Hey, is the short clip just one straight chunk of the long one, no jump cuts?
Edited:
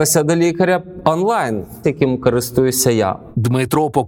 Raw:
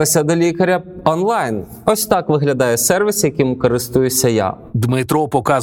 no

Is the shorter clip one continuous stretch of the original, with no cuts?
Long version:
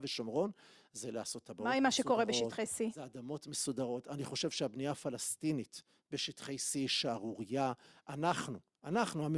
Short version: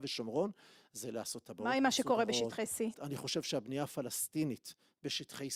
no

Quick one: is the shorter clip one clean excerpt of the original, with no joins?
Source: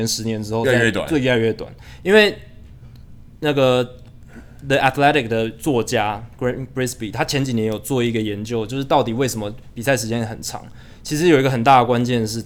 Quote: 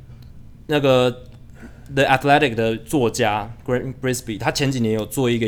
yes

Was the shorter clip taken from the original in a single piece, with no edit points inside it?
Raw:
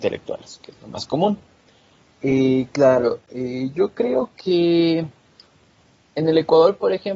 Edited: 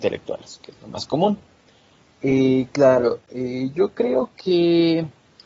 yes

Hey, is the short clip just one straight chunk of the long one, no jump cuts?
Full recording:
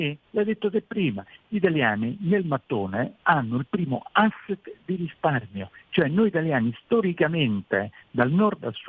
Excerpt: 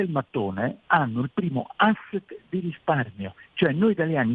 yes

